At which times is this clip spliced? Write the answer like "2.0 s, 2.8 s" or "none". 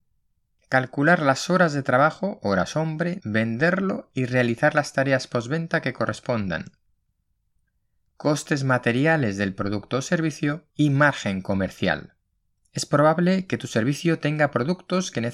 3.2 s, 10.7 s, 12.6 s